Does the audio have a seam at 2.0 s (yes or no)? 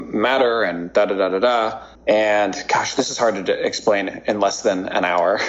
yes